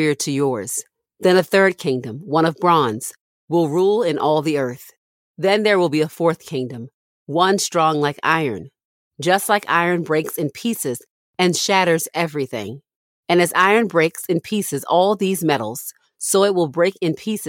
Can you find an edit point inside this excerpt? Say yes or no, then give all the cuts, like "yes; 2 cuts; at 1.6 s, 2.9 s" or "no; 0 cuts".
no; 0 cuts